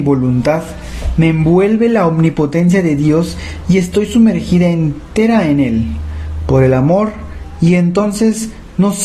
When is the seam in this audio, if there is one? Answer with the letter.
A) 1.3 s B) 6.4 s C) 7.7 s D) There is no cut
D